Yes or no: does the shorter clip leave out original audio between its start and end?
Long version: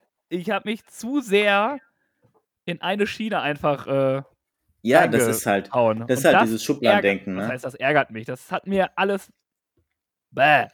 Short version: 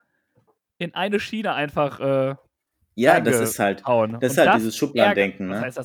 no